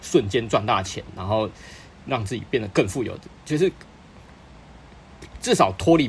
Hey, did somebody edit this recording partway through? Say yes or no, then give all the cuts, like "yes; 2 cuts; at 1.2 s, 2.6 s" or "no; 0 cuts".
no; 0 cuts